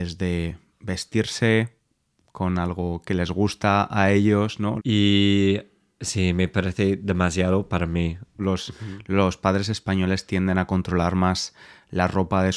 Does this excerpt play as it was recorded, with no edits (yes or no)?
no